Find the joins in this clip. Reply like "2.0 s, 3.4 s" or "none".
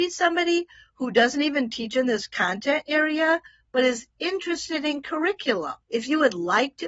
5.8 s